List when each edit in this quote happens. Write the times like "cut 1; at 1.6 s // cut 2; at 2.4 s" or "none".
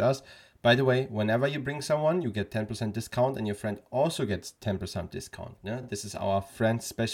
none